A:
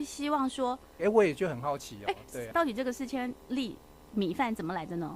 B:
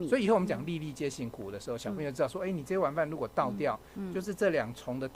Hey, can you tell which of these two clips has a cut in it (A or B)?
A